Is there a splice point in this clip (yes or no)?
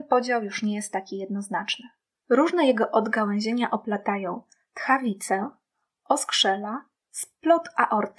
yes